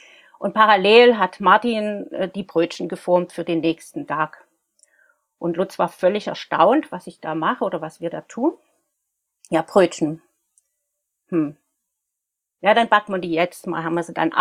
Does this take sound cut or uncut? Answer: uncut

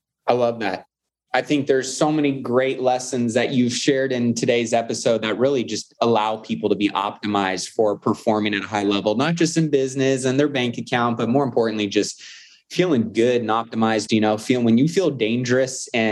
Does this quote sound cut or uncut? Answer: cut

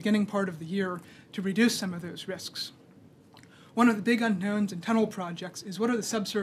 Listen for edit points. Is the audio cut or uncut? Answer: uncut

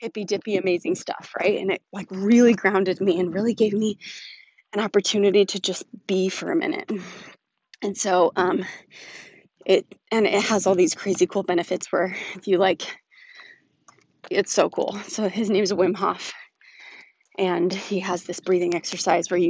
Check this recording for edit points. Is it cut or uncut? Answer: uncut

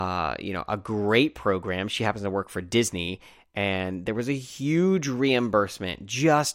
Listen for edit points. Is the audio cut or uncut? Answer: uncut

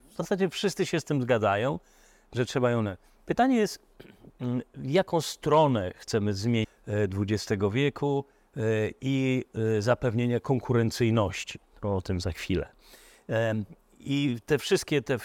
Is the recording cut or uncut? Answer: cut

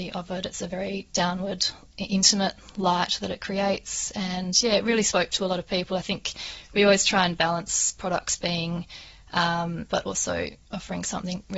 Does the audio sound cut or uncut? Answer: cut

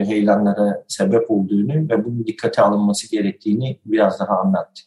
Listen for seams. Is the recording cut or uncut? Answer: uncut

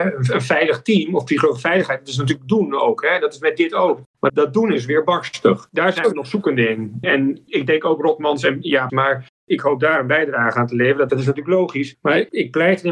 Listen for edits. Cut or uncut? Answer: cut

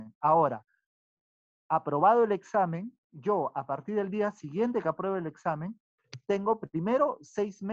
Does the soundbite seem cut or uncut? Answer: cut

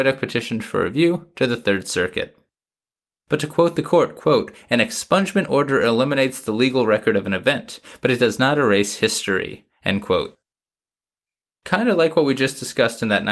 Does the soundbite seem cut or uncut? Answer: cut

